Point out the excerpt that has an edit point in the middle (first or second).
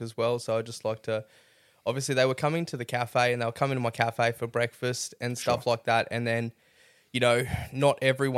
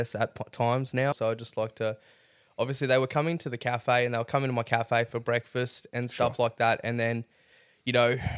second